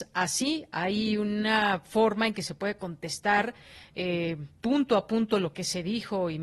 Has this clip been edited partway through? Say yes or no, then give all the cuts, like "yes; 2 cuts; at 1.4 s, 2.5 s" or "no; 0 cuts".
no; 0 cuts